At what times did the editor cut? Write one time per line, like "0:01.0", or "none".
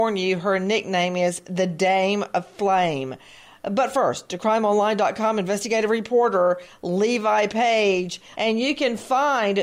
0:08.3